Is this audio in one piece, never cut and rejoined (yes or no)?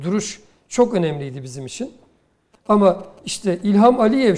no